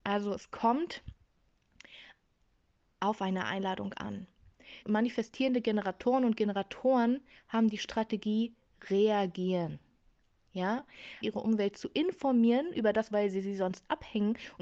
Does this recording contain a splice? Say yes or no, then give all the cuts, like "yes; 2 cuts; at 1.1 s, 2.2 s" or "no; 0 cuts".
yes; 3 cuts; at 4.8 s, 11.2 s, 13.1 s